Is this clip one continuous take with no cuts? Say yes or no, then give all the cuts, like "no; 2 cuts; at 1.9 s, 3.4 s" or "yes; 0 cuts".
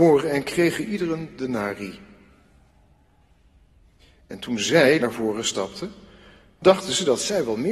no; 1 cut; at 5.0 s